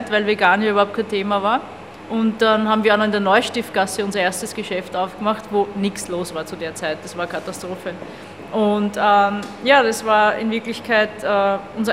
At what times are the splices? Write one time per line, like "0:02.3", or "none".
none